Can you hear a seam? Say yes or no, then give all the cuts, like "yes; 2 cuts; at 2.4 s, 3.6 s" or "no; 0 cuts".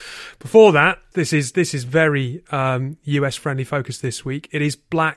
yes; 1 cut; at 1.1 s